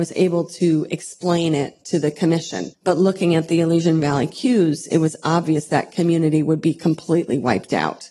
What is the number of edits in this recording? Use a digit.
1